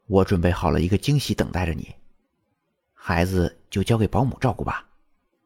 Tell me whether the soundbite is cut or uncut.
uncut